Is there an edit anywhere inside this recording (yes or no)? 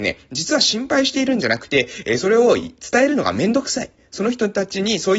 no